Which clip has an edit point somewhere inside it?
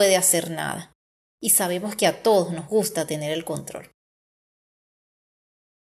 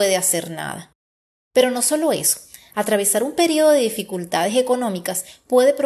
second; 1 cut; at 1.3 s

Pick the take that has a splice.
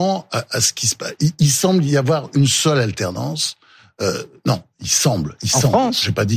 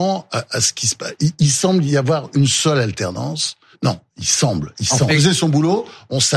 second; 2 cuts; at 3.7 s, 5.1 s

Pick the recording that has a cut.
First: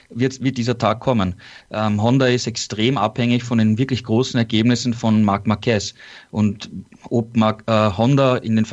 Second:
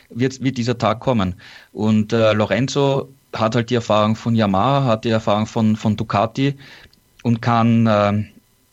first; 1 cut; at 1.6 s

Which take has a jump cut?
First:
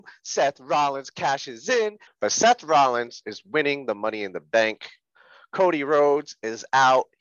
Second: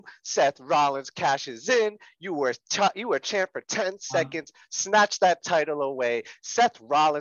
first; 1 cut; at 2.1 s

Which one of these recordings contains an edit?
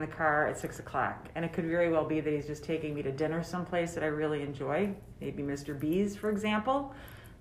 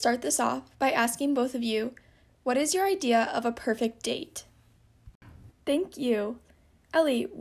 second; 1 cut; at 5.5 s

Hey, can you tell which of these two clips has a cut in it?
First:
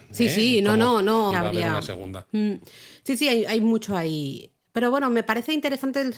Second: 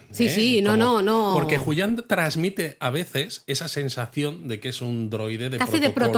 first; 1 cut; at 1.3 s

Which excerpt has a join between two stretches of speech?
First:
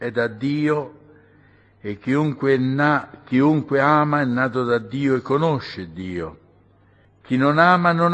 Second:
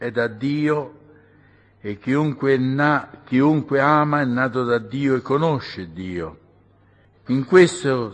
second; 1 cut; at 7.1 s

